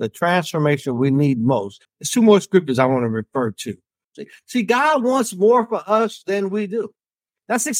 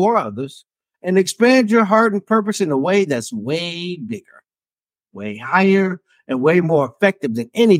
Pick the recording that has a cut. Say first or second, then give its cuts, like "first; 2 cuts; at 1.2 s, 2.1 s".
first; 2 cuts; at 1.8 s, 4.0 s